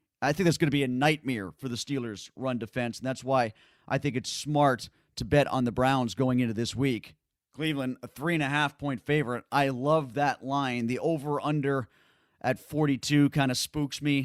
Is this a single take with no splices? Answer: yes; 0 cuts

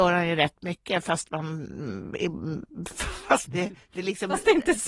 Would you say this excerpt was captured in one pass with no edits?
no; 1 cut; at 3.4 s

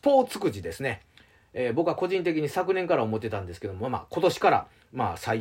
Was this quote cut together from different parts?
no; 0 cuts

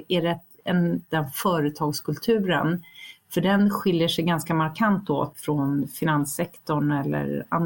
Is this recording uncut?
no; 1 cut; at 1.1 s

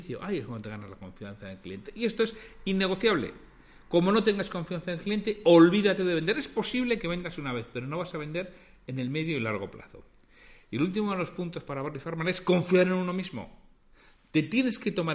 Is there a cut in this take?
no; 0 cuts

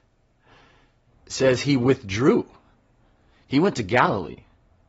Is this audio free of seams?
no; 1 cut; at 1.1 s

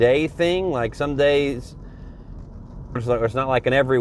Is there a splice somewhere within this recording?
yes; 1 cut; at 3.0 s

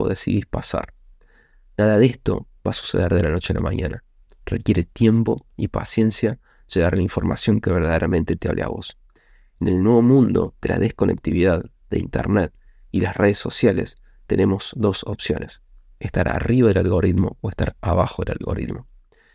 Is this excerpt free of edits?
yes; 0 cuts

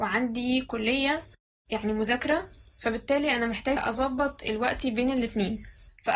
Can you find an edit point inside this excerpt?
no; 0 cuts

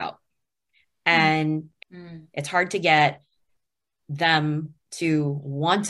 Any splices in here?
yes; 1 cut; at 1.8 s

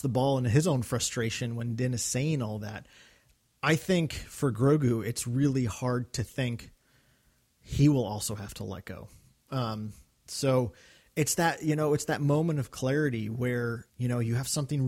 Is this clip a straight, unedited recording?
no; 1 cut; at 13.9 s

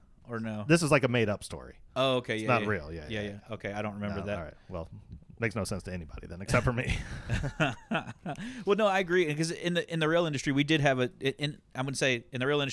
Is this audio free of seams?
yes; 0 cuts

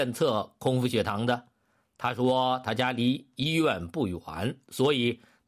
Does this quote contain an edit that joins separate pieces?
no; 0 cuts

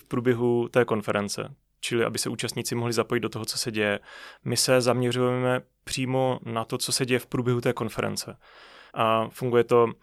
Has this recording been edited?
yes; 2 cuts; at 4.4 s, 8.9 s

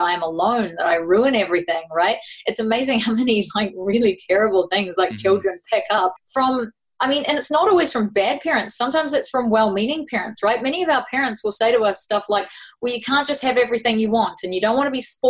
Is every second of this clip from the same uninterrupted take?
yes; 0 cuts

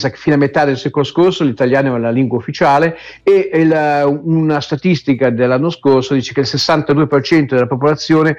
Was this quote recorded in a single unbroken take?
yes; 0 cuts

